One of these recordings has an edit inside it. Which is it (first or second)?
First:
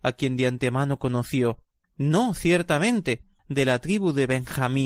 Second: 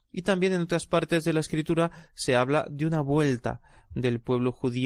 first